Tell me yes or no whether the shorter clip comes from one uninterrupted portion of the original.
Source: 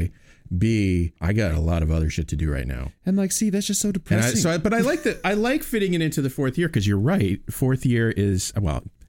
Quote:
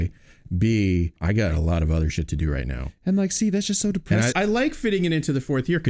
no